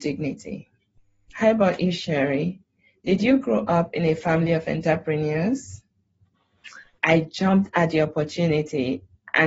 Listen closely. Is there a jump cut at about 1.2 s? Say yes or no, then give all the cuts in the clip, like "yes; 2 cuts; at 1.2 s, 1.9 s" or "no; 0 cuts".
no; 1 cut; at 7.0 s